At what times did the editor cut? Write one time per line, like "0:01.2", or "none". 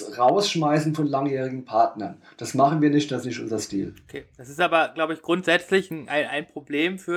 none